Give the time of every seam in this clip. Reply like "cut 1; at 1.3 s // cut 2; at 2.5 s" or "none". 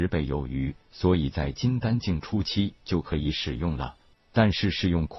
cut 1; at 4.1 s